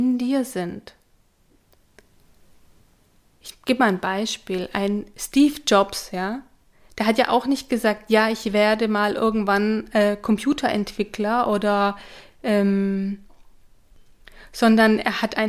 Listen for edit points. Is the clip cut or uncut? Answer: uncut